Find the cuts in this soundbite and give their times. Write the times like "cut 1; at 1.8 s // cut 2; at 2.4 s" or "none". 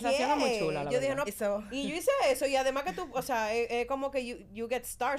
cut 1; at 1.3 s